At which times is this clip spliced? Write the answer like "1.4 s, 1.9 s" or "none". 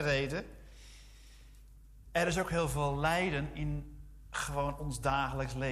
none